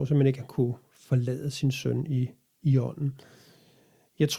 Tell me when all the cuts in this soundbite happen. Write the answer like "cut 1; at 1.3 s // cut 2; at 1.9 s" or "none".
none